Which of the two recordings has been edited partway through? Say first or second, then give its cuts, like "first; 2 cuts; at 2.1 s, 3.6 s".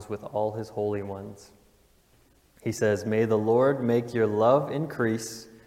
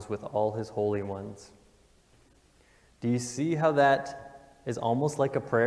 first; 1 cut; at 2.6 s